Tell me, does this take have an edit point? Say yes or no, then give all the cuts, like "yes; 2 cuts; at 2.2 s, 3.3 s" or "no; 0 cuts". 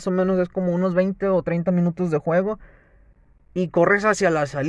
no; 0 cuts